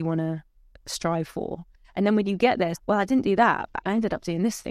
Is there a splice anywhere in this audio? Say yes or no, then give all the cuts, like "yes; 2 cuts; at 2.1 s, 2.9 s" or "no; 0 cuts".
yes; 2 cuts; at 2.7 s, 3.8 s